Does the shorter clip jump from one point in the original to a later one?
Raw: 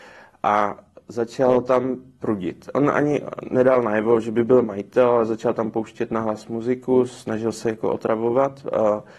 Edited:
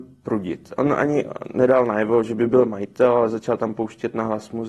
no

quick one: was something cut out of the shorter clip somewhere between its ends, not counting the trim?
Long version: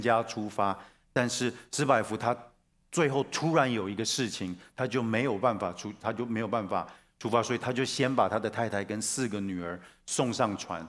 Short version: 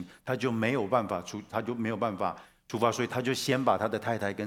no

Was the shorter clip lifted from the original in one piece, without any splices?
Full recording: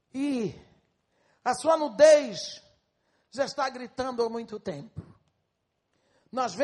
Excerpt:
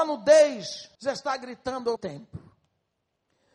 no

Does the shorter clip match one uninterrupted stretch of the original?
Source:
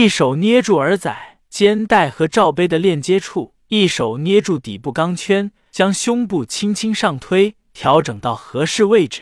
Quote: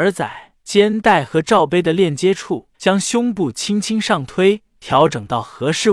no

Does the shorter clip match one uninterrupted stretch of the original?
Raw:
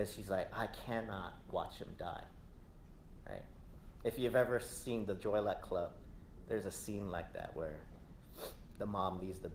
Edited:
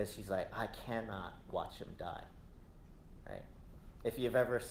yes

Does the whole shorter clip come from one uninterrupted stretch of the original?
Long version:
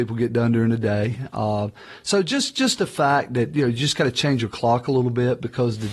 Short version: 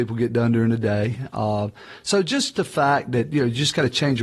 no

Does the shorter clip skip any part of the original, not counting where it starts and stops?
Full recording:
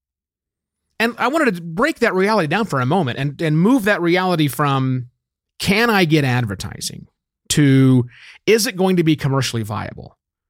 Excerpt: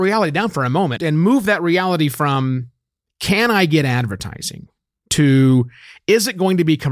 yes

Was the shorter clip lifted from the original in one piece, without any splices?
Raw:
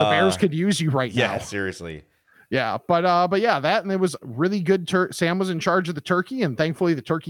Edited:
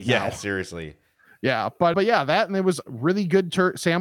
no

